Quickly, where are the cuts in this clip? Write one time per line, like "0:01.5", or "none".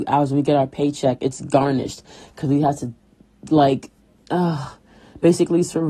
none